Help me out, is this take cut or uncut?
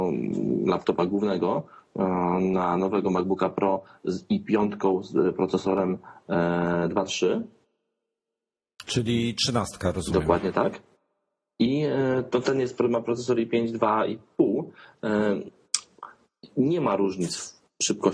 uncut